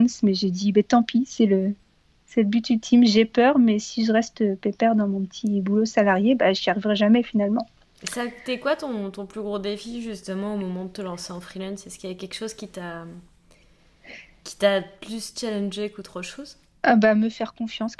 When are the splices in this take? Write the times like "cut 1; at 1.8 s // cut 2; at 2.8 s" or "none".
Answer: none